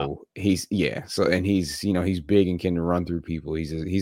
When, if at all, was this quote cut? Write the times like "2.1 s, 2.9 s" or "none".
none